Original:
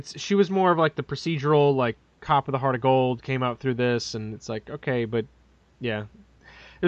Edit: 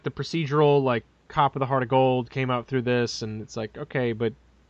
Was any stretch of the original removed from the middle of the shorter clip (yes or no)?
no